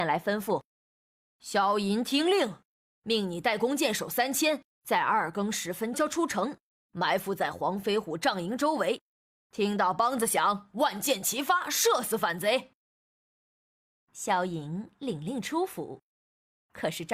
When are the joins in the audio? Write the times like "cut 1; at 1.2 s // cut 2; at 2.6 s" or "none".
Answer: cut 1; at 5.9 s

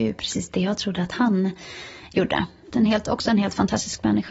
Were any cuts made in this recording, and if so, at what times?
cut 1; at 2.7 s

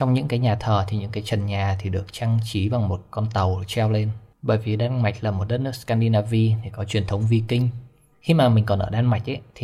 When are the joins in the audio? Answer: cut 1; at 8.1 s

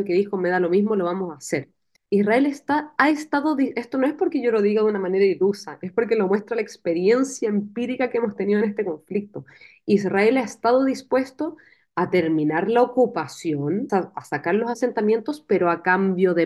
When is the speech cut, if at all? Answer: cut 1; at 2.0 s // cut 2; at 13.9 s

